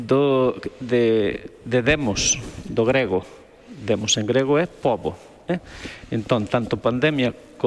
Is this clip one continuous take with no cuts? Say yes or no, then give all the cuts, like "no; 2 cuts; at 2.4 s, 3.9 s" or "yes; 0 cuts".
yes; 0 cuts